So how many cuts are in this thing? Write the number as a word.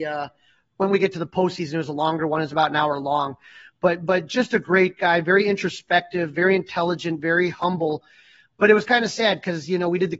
zero